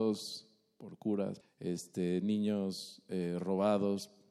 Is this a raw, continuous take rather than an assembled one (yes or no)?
no